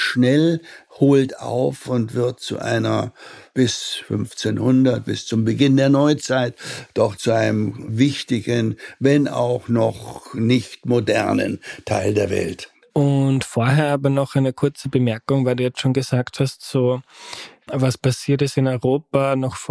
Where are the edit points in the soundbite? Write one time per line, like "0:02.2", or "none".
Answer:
0:12.8